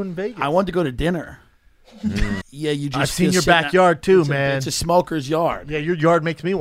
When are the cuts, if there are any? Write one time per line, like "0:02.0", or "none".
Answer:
0:02.4